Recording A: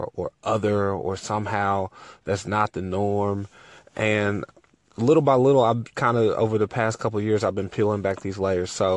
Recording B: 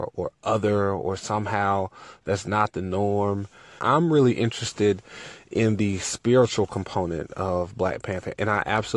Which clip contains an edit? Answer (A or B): B